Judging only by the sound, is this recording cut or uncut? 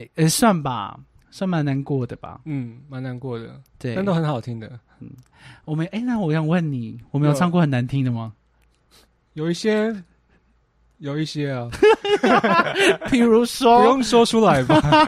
uncut